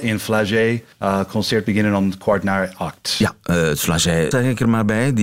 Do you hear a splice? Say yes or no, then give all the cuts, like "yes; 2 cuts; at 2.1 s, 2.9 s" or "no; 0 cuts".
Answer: yes; 2 cuts; at 0.9 s, 4.3 s